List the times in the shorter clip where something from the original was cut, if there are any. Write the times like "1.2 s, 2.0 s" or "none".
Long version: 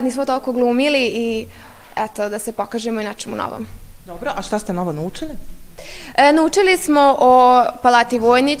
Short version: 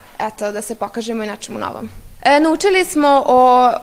2.2 s